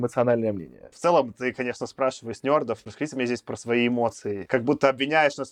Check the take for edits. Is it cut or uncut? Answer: uncut